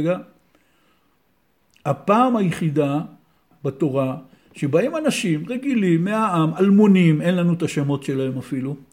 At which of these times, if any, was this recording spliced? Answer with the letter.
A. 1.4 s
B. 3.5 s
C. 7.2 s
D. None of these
B